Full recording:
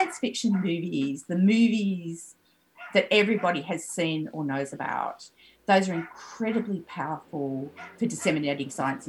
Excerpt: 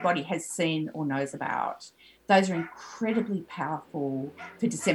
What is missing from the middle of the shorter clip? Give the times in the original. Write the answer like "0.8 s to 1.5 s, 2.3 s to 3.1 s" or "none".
none